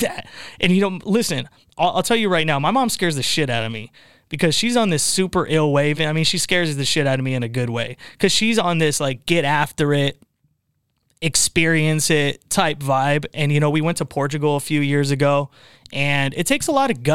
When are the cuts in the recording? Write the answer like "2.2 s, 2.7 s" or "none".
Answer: none